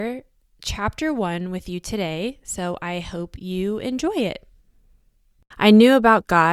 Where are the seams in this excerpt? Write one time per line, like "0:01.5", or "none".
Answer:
0:05.5